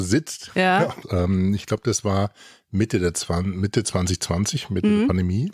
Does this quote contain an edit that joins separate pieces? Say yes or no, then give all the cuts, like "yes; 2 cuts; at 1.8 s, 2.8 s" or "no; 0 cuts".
yes; 1 cut; at 1.0 s